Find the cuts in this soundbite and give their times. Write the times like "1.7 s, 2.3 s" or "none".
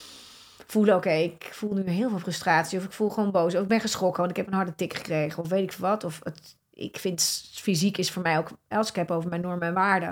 none